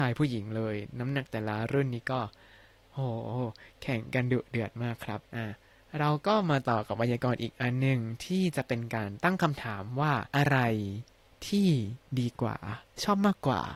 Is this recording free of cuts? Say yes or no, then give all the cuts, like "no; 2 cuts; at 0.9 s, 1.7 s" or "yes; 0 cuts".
no; 2 cuts; at 5.3 s, 10.3 s